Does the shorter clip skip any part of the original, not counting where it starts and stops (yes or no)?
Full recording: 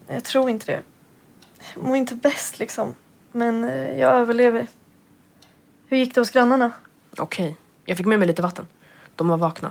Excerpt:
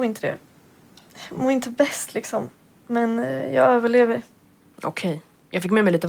yes